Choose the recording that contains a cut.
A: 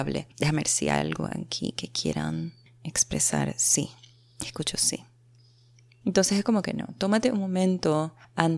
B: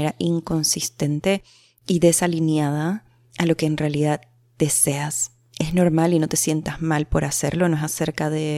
A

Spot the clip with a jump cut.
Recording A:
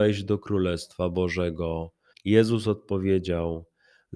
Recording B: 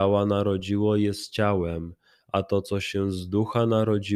A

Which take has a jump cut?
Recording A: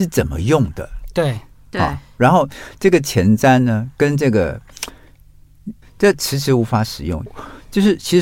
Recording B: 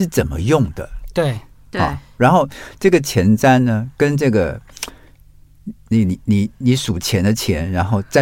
A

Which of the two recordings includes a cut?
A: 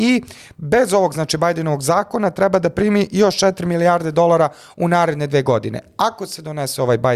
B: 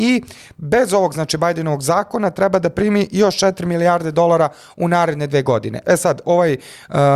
B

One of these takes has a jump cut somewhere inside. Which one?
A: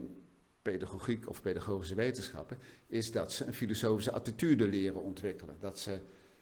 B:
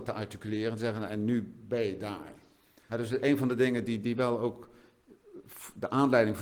B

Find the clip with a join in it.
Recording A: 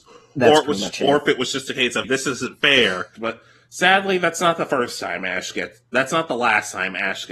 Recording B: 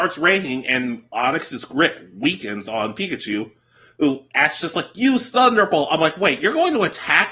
A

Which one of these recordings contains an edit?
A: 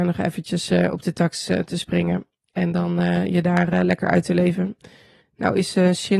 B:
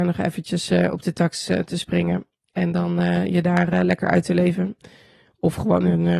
A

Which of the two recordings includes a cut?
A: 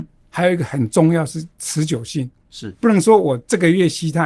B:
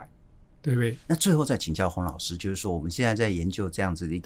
B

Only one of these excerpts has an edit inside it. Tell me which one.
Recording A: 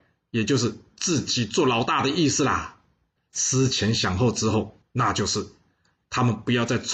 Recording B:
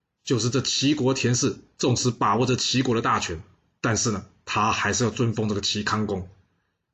A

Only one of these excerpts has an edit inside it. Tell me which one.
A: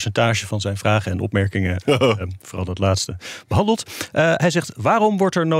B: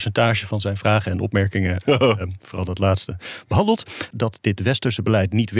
B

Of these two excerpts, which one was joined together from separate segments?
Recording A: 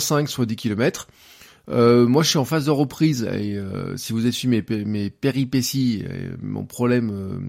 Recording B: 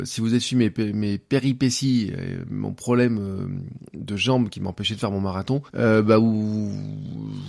B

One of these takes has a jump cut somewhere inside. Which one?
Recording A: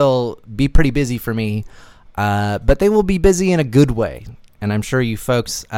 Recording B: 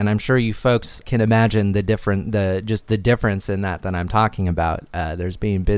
B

